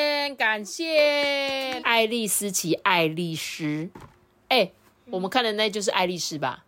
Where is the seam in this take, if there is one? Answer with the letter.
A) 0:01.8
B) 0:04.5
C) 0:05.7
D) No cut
A